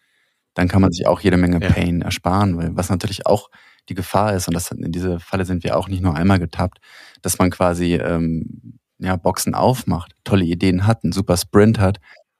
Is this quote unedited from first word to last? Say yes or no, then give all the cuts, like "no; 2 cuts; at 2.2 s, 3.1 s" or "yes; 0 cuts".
yes; 0 cuts